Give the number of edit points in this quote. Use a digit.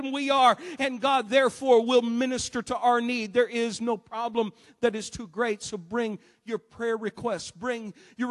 0